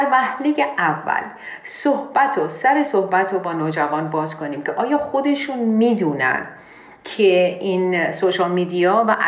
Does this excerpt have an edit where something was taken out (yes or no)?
no